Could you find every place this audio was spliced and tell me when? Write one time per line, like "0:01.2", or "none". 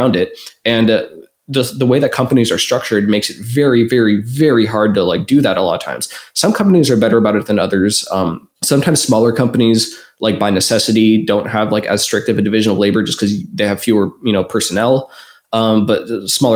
0:08.6